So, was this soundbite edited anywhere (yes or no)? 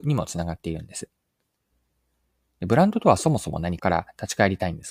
yes